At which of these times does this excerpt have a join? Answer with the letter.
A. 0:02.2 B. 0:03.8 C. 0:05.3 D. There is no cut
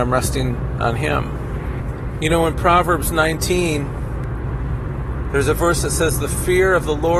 A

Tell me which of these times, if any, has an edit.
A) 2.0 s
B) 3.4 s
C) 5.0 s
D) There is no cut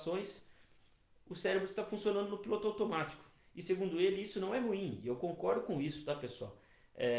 B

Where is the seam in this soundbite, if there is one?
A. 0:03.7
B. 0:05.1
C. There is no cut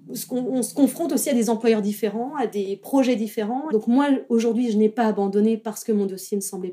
A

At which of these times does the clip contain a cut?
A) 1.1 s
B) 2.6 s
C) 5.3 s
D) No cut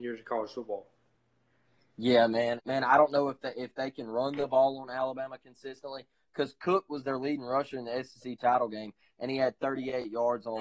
B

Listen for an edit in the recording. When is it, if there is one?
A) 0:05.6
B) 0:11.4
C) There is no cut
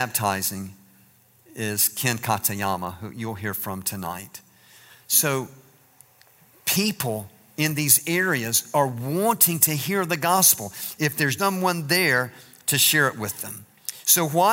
B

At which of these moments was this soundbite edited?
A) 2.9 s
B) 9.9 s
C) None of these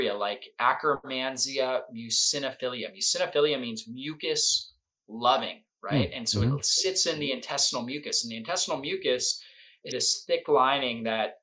B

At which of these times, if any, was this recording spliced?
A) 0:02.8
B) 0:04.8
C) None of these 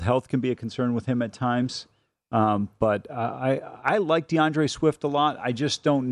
C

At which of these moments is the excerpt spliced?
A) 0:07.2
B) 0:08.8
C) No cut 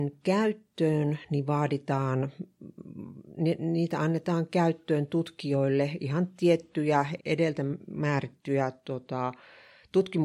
A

